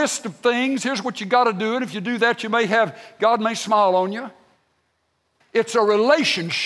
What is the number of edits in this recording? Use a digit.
1